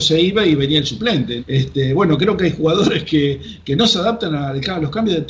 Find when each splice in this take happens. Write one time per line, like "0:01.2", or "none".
0:01.4